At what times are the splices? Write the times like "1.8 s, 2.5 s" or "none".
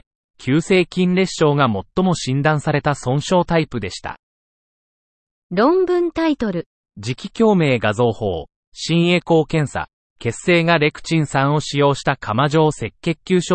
none